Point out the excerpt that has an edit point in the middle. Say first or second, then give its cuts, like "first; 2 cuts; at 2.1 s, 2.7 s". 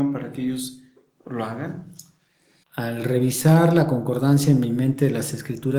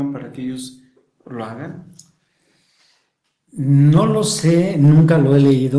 first; 1 cut; at 2.6 s